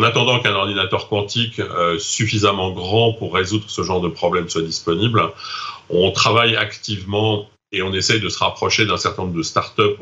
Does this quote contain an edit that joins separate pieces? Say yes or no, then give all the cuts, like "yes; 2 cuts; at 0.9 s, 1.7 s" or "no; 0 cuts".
no; 0 cuts